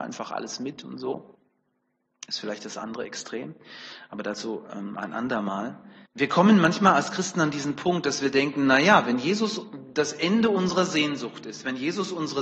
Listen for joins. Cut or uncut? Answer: cut